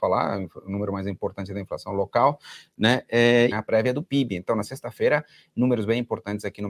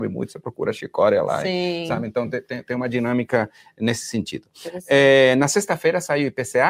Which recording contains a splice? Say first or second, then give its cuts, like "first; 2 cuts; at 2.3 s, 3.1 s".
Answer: first; 1 cut; at 3.5 s